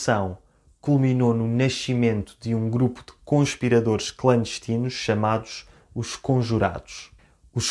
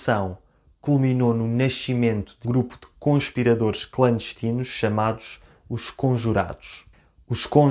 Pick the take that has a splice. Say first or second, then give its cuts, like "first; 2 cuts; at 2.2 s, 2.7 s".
second; 1 cut; at 2.4 s